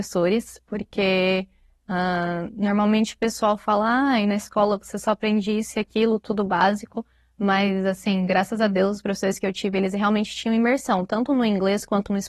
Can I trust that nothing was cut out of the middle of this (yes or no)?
yes